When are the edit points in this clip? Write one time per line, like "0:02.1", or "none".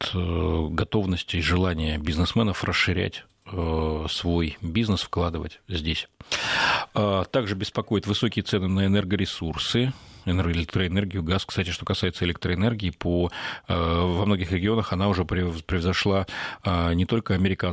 none